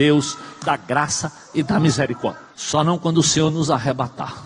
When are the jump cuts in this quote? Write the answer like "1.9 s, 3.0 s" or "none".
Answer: 2.5 s